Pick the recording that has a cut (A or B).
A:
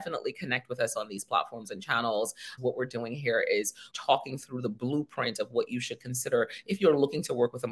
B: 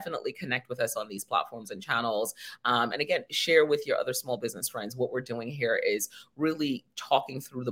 A